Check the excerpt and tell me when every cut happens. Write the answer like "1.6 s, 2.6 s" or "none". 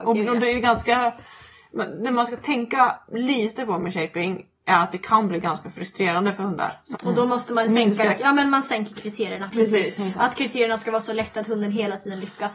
6.9 s

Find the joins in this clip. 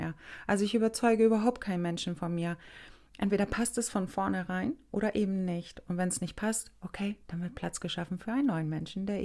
none

